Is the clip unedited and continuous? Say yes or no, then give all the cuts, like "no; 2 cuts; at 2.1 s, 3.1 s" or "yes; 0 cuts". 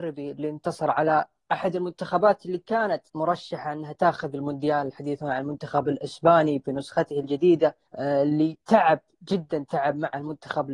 no; 2 cuts; at 3.1 s, 7.9 s